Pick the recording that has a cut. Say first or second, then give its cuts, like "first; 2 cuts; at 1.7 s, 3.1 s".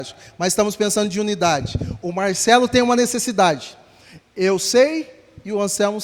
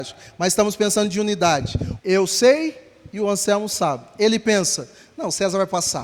second; 1 cut; at 2.0 s